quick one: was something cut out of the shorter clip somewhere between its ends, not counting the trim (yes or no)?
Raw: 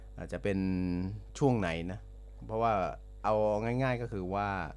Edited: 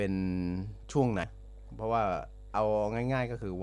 yes